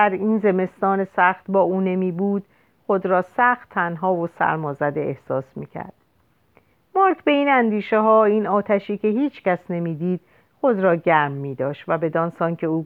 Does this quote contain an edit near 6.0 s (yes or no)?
no